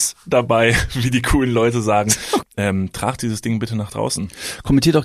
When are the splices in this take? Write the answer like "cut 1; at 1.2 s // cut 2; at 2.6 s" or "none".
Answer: cut 1; at 2.4 s